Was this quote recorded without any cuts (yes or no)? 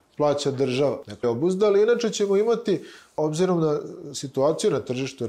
no